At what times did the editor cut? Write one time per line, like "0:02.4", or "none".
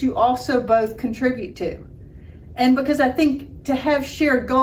none